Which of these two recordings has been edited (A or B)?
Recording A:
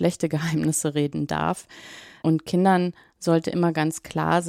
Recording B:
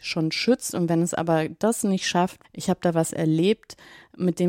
B